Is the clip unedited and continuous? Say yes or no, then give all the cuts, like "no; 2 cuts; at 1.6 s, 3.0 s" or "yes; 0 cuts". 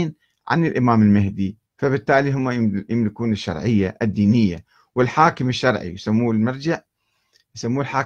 no; 1 cut; at 1.7 s